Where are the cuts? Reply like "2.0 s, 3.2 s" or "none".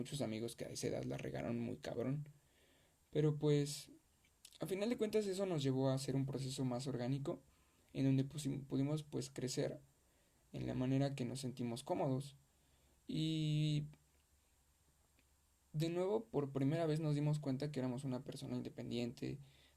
none